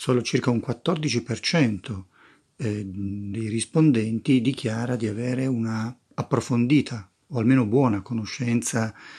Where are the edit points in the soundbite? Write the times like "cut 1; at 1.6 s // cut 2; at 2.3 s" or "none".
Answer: none